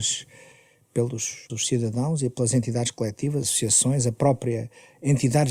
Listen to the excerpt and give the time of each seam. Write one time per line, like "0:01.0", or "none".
0:01.5
0:03.4